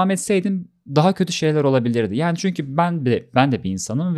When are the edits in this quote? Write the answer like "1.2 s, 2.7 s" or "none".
none